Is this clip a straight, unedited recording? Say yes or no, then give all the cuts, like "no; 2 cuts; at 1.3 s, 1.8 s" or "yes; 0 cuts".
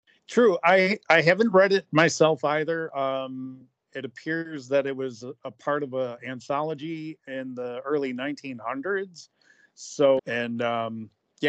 no; 1 cut; at 10.2 s